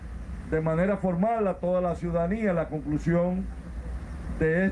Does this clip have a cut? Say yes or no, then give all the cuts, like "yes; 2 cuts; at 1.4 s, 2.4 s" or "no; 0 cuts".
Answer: no; 0 cuts